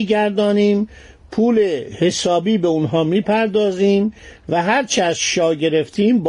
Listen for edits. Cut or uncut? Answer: uncut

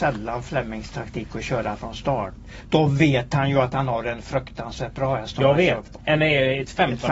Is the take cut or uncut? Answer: cut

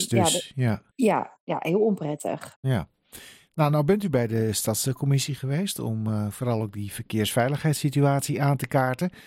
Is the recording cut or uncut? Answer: uncut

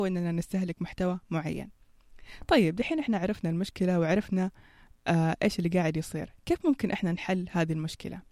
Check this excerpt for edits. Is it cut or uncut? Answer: uncut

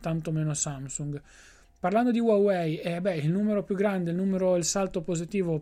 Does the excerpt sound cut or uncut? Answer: uncut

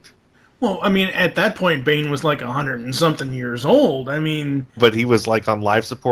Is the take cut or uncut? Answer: cut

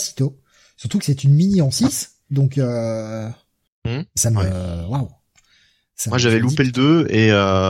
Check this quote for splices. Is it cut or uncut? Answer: cut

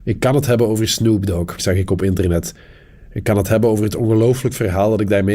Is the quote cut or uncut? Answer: cut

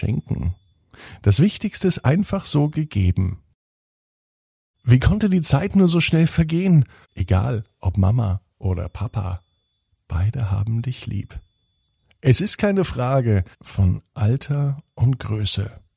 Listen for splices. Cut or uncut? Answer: cut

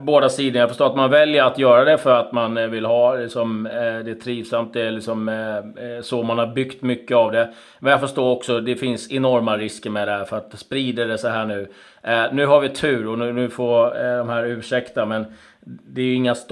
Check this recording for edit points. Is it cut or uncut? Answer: uncut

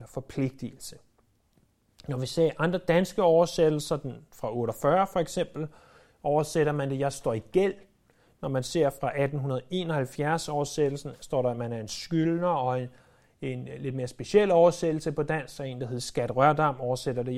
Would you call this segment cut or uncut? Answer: uncut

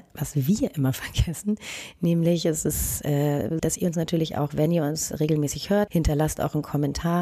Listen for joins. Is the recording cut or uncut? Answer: cut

